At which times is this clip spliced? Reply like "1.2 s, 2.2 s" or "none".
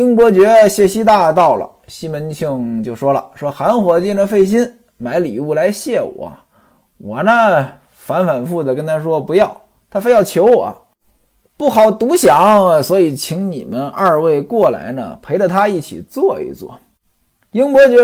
8.5 s